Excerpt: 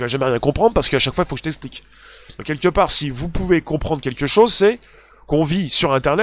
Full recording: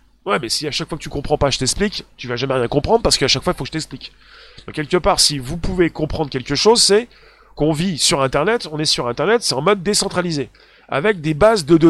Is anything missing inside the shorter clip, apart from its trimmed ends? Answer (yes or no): no